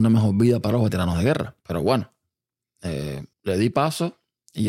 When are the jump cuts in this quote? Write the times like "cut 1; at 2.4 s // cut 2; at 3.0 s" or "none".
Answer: cut 1; at 1.6 s // cut 2; at 3.3 s

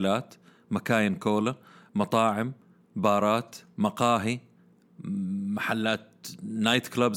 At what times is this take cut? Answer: none

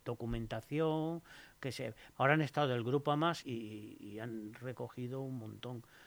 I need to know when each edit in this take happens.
cut 1; at 2.1 s // cut 2; at 3.4 s

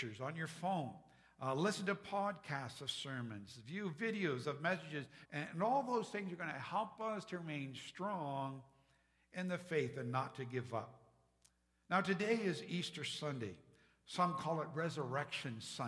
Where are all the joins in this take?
cut 1; at 5.2 s

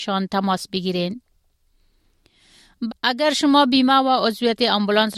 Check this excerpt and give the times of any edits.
cut 1; at 2.9 s

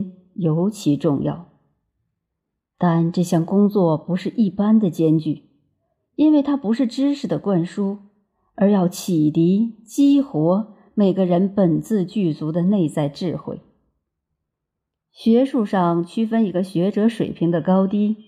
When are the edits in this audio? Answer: cut 1; at 6.0 s

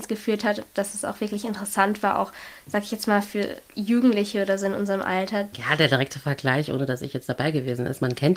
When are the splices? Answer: cut 1; at 5.5 s

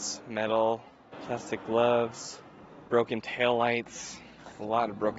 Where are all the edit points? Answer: cut 1; at 1.1 s // cut 2; at 2.9 s

